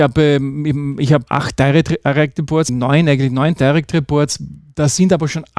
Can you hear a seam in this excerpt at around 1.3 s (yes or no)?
yes